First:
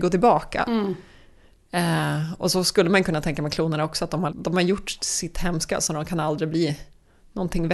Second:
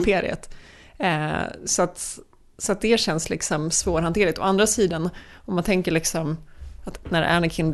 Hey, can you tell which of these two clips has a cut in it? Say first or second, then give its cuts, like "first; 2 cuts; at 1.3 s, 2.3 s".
first; 1 cut; at 4.3 s